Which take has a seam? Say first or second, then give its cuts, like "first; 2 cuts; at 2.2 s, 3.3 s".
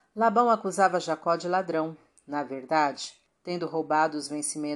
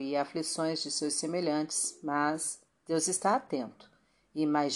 first; 1 cut; at 3.2 s